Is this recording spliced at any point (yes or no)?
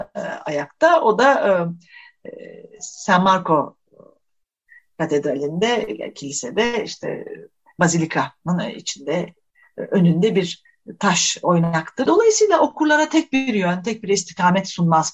yes